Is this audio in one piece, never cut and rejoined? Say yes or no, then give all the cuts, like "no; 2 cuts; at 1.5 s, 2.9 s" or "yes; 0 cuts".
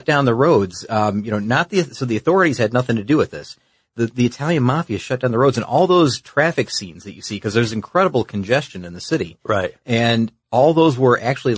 yes; 0 cuts